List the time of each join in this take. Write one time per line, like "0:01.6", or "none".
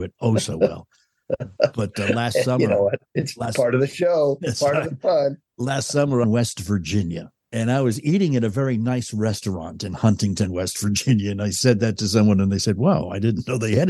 0:03.1
0:06.2